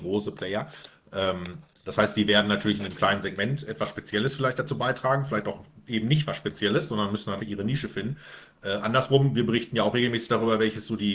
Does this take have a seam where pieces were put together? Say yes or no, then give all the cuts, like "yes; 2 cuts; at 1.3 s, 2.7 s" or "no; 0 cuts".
yes; 1 cut; at 7.4 s